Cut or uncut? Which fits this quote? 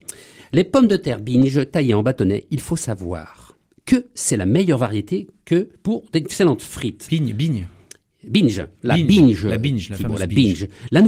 uncut